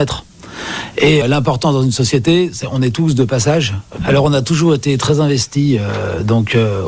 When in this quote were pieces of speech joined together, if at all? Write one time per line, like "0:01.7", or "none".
0:01.2
0:04.0